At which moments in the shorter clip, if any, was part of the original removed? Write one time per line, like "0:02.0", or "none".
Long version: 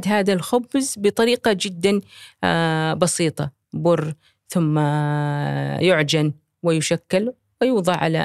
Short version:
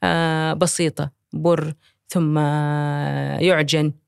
none